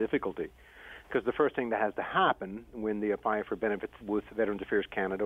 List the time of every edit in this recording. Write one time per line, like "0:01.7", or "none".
0:04.0